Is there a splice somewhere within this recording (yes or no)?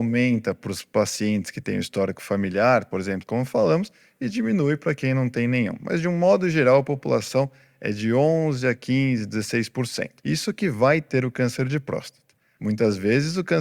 yes